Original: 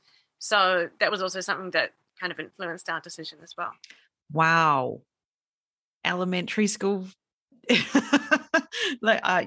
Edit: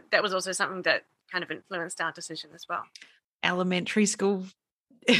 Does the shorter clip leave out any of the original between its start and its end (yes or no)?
yes